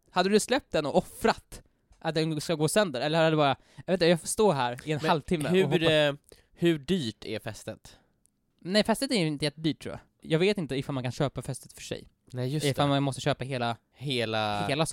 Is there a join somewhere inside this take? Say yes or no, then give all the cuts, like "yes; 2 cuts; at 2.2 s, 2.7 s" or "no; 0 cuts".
no; 0 cuts